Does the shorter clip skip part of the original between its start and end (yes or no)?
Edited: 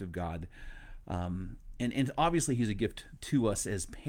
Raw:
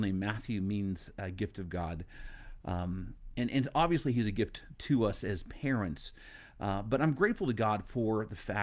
no